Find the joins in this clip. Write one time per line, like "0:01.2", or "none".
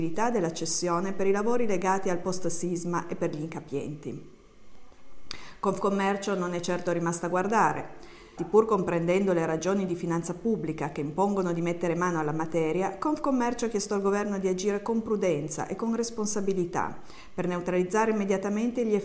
0:08.4